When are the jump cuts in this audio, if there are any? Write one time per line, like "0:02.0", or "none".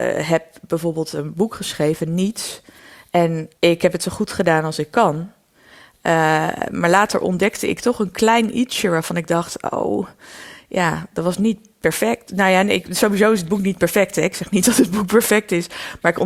0:03.6